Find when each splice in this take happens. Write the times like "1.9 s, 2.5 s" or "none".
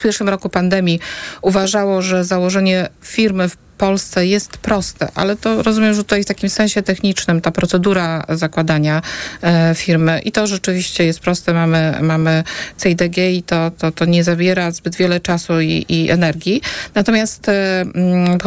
none